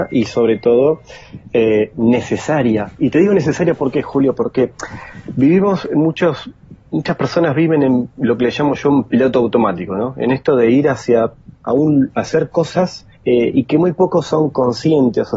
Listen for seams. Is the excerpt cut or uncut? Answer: cut